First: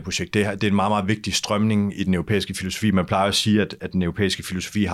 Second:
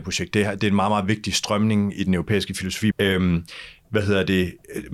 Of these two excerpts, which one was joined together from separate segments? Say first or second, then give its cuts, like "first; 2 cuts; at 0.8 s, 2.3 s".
second; 1 cut; at 2.9 s